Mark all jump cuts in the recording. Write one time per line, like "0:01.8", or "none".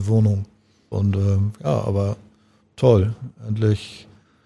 0:00.9